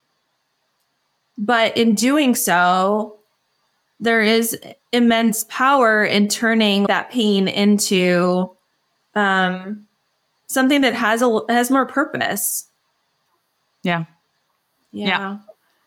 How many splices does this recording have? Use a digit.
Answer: 0